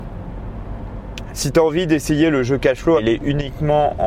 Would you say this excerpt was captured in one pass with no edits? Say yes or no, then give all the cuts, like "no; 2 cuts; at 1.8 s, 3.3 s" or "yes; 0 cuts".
no; 2 cuts; at 1.3 s, 3.0 s